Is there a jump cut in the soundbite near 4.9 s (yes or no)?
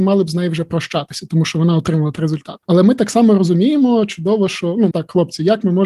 yes